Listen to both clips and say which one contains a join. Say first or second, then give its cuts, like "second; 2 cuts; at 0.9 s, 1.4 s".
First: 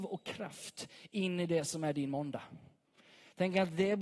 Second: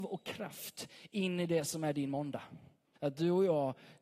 second; 1 cut; at 3.0 s